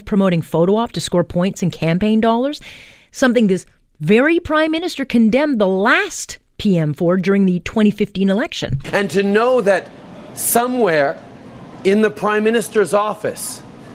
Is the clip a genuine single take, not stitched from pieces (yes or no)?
yes